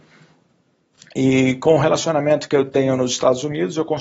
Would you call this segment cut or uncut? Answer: uncut